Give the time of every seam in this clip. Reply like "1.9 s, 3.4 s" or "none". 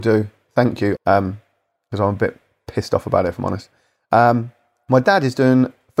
1.0 s

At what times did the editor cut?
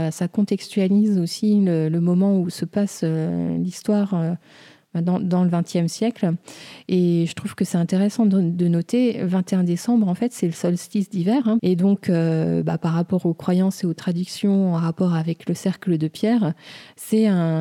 11.6 s

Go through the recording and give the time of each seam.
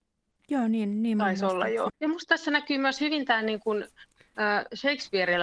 1.9 s

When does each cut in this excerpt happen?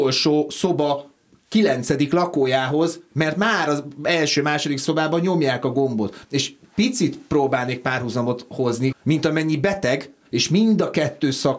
6.2 s, 8.9 s, 10.2 s

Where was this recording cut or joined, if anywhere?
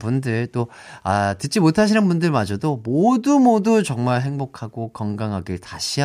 none

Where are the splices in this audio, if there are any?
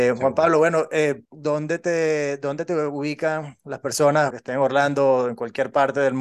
1.3 s, 4.3 s

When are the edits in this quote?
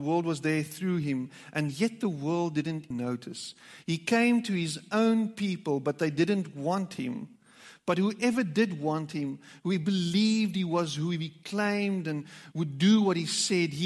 2.9 s

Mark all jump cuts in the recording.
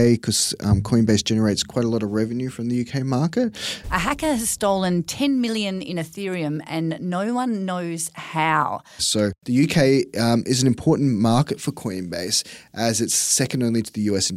3.8 s, 9.0 s

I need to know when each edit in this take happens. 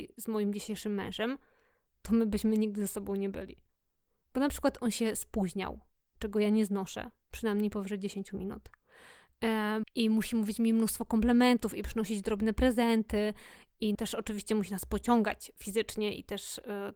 9.8 s, 13.9 s

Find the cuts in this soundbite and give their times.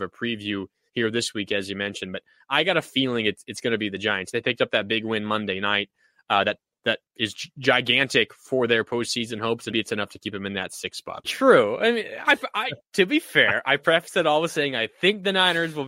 9.7 s, 11.2 s

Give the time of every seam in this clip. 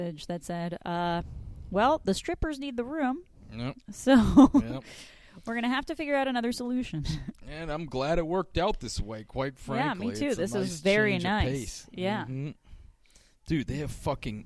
none

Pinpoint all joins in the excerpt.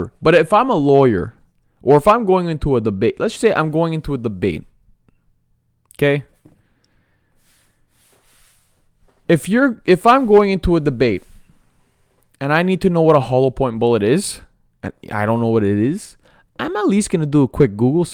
3.4 s

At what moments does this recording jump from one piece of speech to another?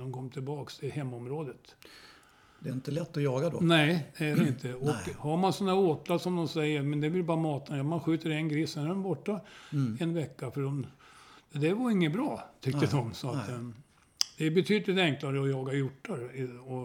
none

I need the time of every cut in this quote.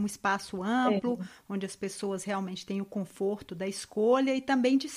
none

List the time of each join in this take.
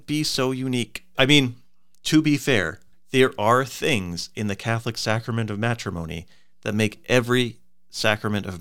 1.2 s, 2.9 s

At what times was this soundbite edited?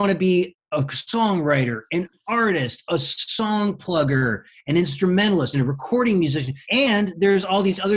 5.5 s, 6.6 s

